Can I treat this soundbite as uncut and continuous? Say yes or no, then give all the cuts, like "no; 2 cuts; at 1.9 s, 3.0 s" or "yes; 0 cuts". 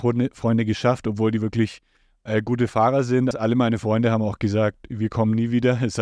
no; 1 cut; at 3.3 s